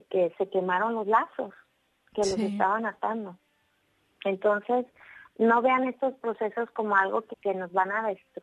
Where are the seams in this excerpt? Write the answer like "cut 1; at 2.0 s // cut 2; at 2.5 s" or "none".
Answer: cut 1; at 7.3 s